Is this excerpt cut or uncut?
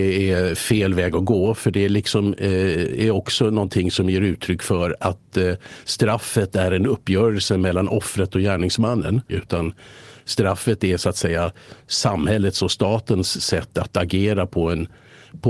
cut